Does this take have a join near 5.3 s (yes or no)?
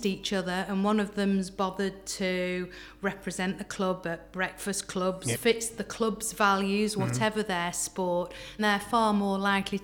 yes